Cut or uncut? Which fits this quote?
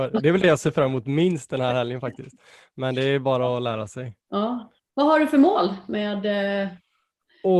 cut